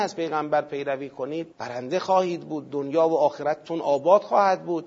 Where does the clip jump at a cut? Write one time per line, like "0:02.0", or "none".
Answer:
0:01.5